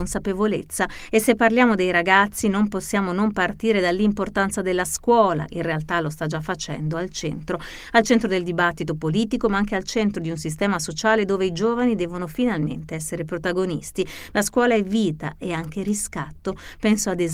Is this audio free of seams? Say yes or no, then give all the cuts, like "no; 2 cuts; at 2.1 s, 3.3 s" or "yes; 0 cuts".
no; 2 cuts; at 5.5 s, 14.3 s